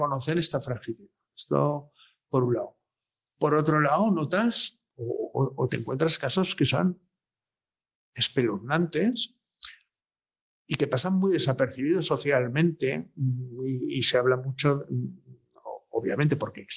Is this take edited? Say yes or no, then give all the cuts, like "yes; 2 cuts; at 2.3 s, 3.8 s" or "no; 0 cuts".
no; 0 cuts